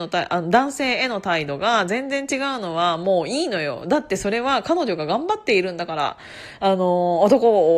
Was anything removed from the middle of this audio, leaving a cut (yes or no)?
no